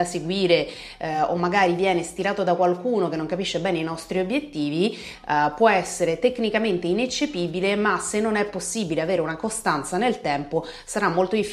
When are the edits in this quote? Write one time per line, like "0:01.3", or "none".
none

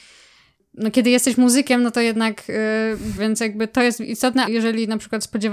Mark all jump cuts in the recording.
0:03.2
0:04.5

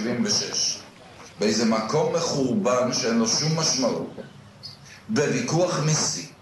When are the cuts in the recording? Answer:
none

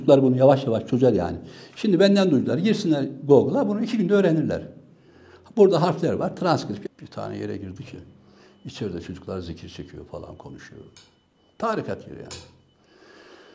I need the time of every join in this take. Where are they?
0:06.8

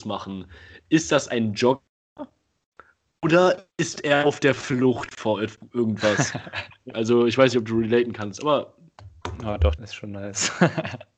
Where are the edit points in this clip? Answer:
0:06.9
0:09.8

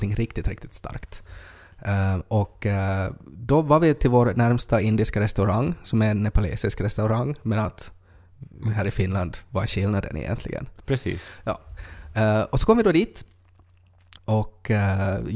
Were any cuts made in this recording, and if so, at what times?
0:14.2

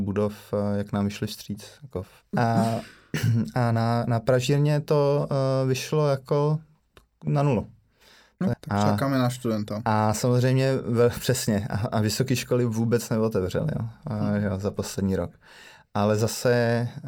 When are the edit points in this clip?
0:02.3
0:08.5

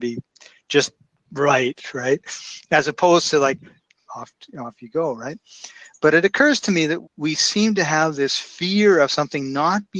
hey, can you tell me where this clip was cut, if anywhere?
0:04.0
0:07.0

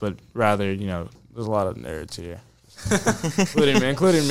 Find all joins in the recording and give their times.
none

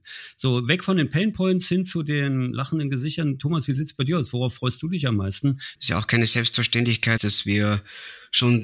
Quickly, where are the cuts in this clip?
0:05.7
0:07.2

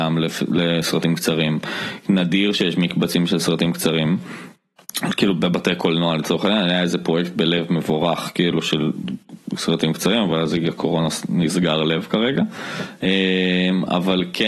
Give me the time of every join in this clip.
none

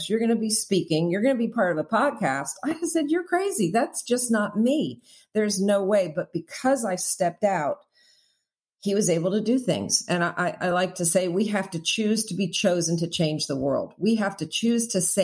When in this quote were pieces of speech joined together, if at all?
none

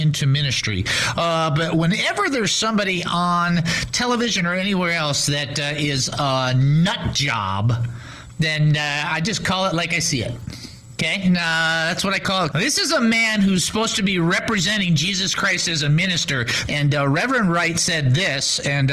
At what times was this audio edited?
0:12.5
0:16.7

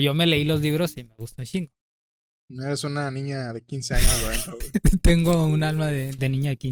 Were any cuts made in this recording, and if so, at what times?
none

